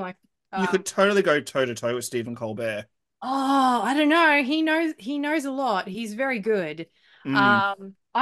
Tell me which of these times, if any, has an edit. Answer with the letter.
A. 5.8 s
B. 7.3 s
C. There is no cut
C